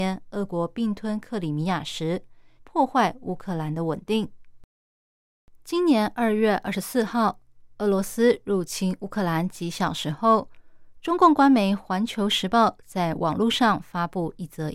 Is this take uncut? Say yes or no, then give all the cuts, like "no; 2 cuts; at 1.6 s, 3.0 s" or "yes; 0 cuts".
no; 1 cut; at 2.6 s